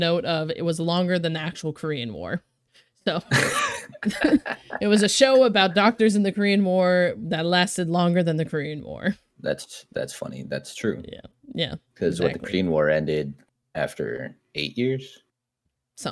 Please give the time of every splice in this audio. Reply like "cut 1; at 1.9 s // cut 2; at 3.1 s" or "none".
none